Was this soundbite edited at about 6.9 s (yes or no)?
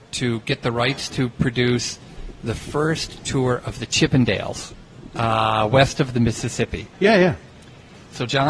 yes